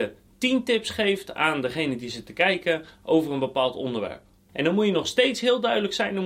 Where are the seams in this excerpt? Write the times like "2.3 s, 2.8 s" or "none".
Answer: 4.5 s